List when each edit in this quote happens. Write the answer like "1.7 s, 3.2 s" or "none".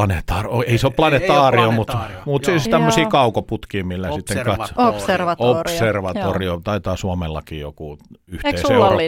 none